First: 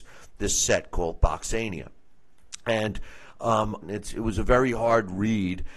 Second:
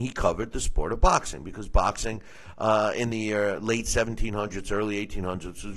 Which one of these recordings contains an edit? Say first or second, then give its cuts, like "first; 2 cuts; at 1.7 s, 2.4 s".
first; 1 cut; at 3.8 s